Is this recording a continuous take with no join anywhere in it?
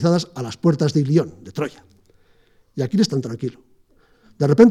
yes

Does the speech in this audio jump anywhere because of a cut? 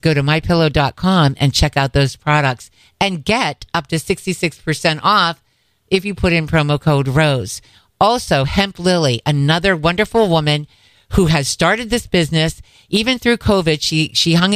no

